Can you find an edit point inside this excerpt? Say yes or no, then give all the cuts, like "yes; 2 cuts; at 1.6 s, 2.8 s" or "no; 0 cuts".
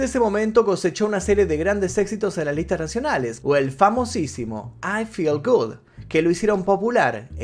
yes; 1 cut; at 3.4 s